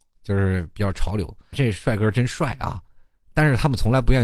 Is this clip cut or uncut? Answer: cut